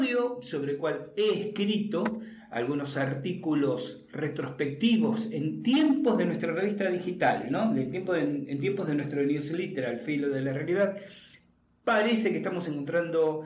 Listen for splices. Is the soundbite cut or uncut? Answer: uncut